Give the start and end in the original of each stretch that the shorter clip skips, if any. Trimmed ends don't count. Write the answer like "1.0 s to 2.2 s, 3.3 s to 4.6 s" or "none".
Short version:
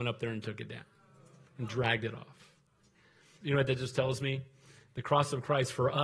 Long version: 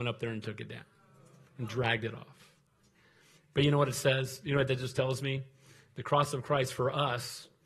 3.4 s to 4.4 s